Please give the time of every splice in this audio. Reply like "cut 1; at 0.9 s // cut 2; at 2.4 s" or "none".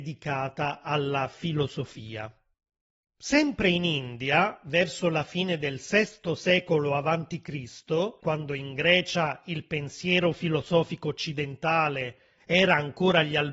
cut 1; at 8.2 s